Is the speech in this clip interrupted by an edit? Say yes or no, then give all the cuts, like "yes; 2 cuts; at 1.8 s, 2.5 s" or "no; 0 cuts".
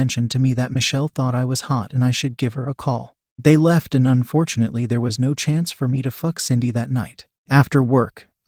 no; 0 cuts